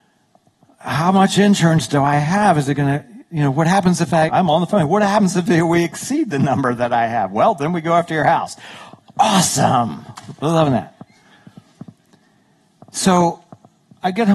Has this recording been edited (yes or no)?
yes